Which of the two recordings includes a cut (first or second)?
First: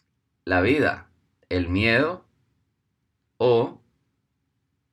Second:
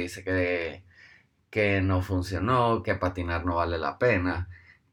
second